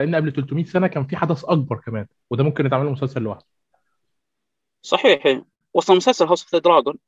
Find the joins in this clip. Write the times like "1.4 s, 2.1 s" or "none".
none